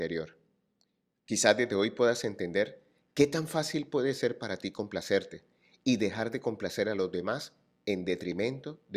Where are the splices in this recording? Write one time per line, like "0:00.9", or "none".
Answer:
0:01.2